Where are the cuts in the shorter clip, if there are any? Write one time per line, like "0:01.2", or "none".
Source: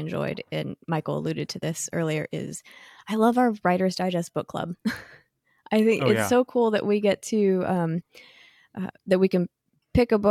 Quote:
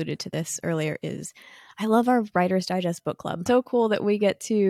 0:03.5